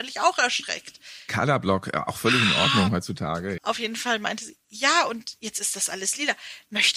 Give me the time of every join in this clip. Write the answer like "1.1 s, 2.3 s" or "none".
3.6 s